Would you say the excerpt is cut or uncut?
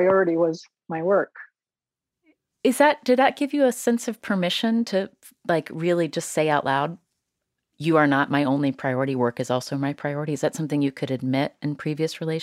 uncut